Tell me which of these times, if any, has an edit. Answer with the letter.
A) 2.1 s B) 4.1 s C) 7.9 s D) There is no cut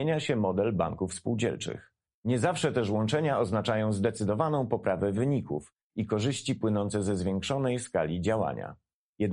A